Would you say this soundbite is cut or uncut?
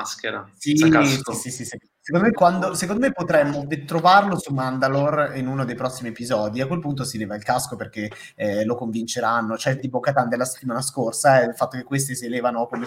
cut